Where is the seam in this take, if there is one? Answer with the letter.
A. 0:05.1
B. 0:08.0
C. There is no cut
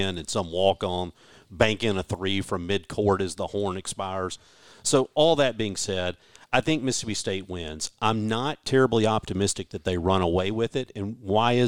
C